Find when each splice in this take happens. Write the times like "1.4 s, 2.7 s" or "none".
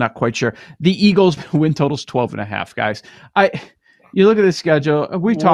1.4 s